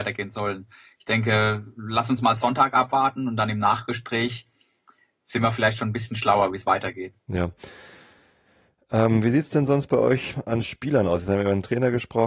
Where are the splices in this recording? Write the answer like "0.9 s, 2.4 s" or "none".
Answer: none